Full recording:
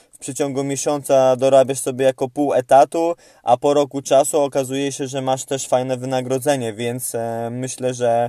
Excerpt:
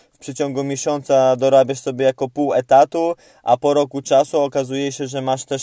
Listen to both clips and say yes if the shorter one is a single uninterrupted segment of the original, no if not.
yes